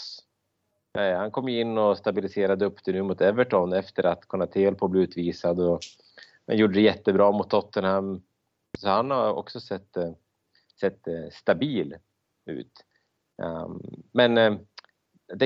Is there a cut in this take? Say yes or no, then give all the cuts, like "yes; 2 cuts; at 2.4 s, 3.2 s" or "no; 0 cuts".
no; 0 cuts